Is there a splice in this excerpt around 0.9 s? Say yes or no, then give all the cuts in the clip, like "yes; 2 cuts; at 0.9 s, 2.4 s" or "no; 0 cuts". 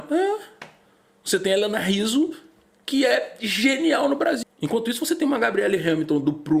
no; 1 cut; at 4.4 s